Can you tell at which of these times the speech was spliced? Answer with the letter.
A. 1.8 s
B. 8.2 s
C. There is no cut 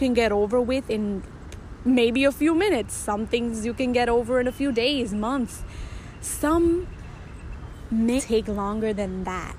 B